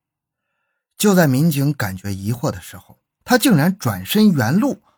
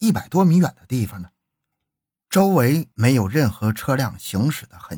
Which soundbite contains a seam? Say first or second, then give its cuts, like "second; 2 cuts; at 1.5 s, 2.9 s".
first; 1 cut; at 3.2 s